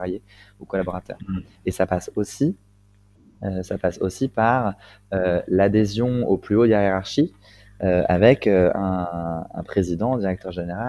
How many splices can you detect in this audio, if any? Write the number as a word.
one